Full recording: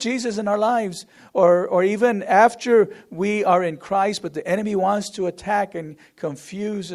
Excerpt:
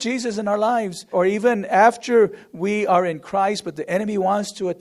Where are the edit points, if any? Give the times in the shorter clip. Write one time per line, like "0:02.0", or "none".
0:01.1